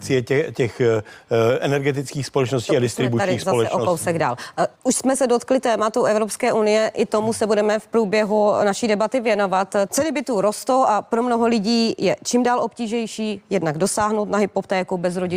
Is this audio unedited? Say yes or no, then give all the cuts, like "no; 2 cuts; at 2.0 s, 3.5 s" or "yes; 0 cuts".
no; 2 cuts; at 4.8 s, 9.9 s